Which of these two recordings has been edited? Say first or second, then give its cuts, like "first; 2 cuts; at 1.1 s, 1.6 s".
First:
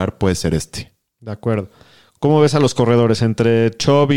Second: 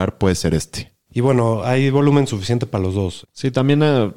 second; 2 cuts; at 1.1 s, 3.2 s